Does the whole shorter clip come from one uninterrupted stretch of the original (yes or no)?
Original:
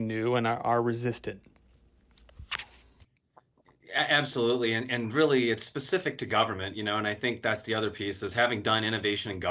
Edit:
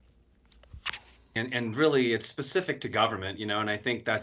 no